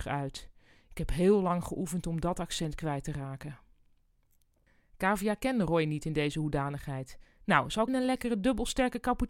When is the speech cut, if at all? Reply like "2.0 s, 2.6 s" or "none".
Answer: 7.9 s